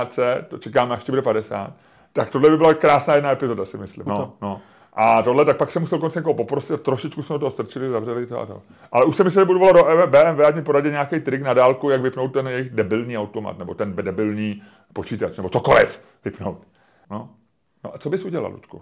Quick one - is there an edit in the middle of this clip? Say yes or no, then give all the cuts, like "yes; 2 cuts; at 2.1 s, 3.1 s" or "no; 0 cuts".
yes; 2 cuts; at 4.1 s, 17.0 s